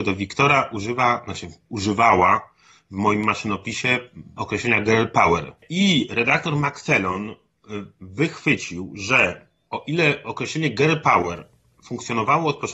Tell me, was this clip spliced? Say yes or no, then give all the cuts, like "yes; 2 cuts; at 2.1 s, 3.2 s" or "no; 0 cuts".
no; 0 cuts